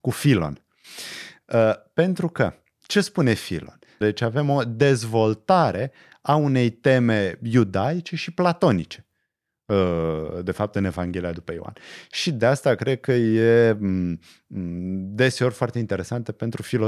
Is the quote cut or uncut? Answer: cut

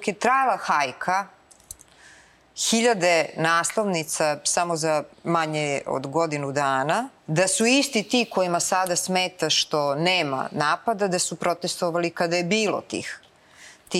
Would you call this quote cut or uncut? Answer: cut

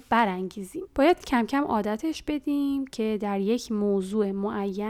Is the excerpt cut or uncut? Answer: uncut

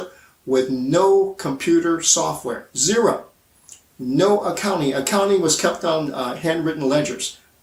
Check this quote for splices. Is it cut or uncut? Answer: uncut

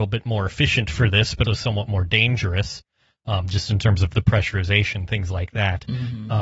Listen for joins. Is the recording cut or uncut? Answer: cut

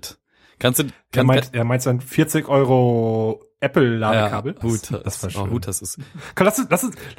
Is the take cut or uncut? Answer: cut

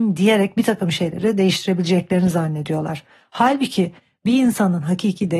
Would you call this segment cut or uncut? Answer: uncut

